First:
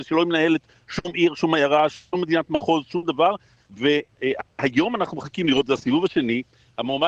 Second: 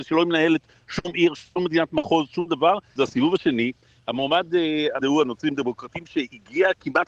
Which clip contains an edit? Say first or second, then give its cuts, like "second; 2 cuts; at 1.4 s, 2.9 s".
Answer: second; 3 cuts; at 1.3 s, 3.0 s, 5.0 s